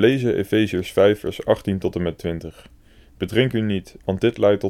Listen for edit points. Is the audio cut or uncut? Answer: uncut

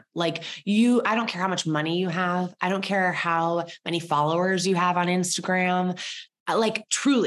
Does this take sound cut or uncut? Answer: uncut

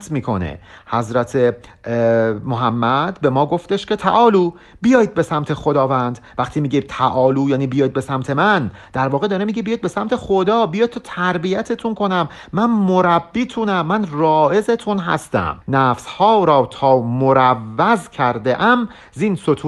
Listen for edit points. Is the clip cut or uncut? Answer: cut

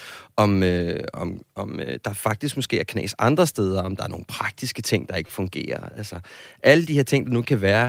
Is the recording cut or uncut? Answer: uncut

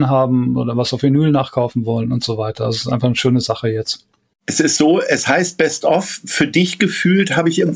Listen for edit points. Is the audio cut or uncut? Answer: uncut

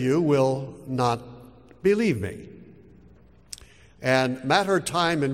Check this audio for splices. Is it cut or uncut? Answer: cut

